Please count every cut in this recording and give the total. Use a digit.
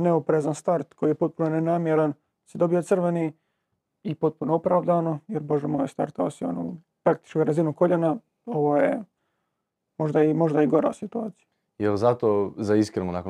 0